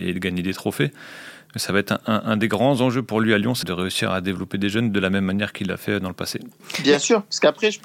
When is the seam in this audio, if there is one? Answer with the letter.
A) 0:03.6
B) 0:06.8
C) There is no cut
A